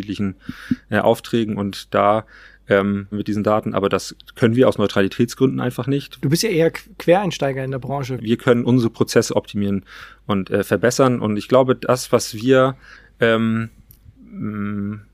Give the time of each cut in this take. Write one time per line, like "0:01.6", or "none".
0:03.1
0:06.2
0:08.2